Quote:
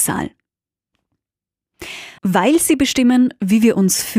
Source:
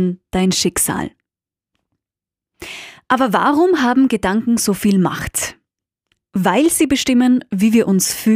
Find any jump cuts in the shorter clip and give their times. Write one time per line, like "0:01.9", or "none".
0:02.2